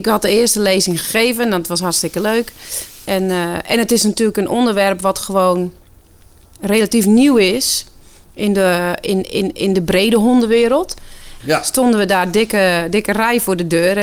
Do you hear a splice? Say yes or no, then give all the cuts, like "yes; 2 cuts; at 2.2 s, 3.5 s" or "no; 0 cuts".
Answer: yes; 2 cuts; at 3.1 s, 11.4 s